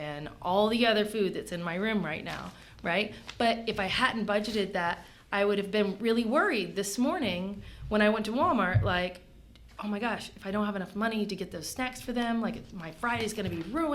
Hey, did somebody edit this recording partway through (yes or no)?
no